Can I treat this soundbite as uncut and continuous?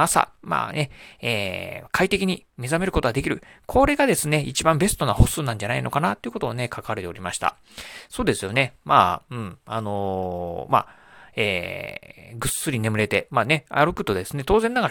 yes; 0 cuts

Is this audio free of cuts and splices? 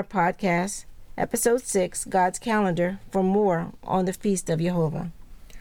yes; 0 cuts

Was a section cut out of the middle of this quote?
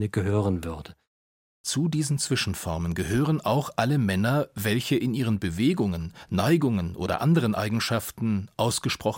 no; 0 cuts

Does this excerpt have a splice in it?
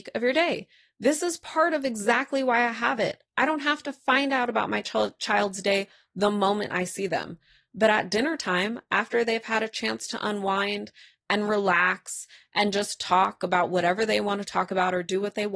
no; 0 cuts

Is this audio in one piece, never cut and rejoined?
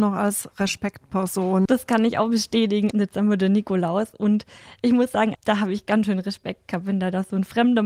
no; 3 cuts; at 1.7 s, 2.9 s, 5.3 s

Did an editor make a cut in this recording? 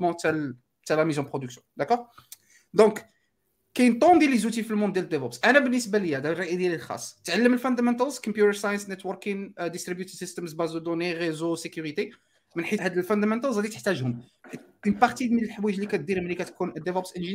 yes; 1 cut; at 12.8 s

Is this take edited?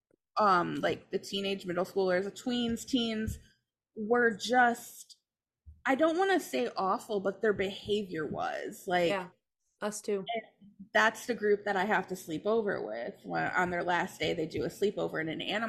no; 0 cuts

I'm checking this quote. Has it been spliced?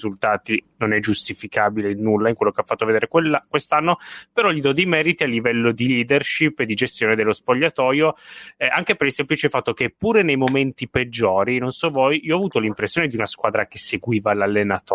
yes; 1 cut; at 5.7 s

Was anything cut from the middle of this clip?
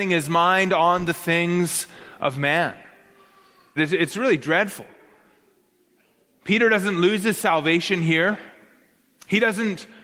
yes; 1 cut; at 3.8 s

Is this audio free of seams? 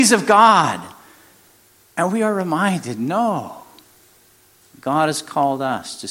yes; 0 cuts

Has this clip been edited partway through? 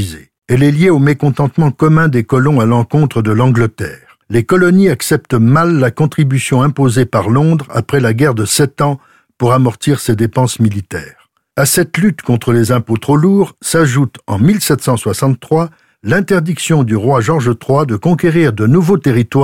no; 0 cuts

